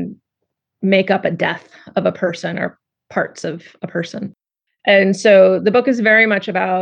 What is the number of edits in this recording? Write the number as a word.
one